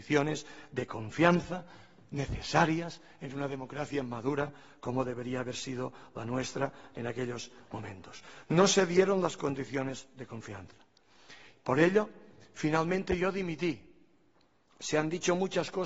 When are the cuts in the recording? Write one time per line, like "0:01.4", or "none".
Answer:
none